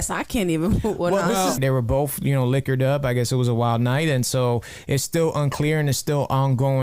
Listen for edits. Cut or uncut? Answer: cut